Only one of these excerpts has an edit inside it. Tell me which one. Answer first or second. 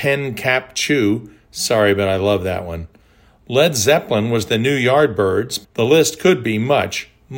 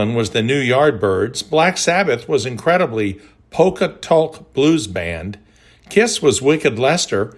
first